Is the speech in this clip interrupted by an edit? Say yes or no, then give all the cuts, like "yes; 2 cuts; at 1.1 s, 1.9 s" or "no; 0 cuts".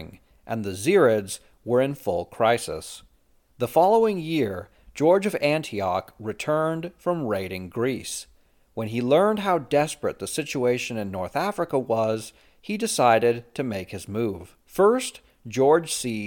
yes; 1 cut; at 14.6 s